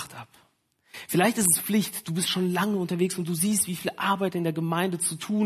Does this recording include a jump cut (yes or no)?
no